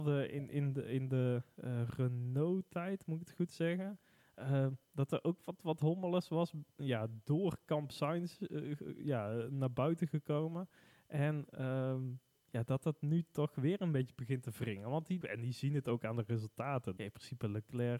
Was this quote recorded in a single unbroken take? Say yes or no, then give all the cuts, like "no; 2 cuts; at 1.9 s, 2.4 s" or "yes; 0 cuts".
no; 2 cuts; at 15.2 s, 17.0 s